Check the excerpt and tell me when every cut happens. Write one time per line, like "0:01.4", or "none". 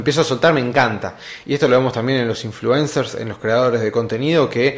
0:01.4